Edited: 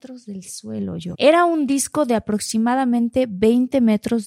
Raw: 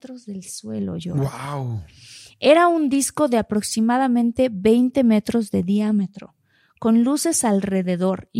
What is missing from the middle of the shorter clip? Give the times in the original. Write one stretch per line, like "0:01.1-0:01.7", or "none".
0:01.1-0:02.3